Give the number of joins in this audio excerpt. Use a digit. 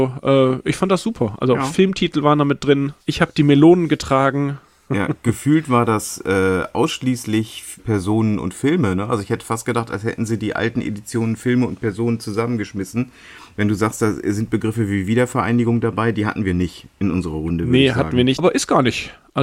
3